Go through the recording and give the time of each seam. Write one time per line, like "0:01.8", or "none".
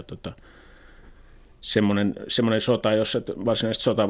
none